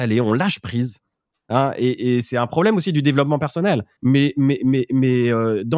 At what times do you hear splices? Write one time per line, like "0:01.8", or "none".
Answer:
0:01.3
0:04.0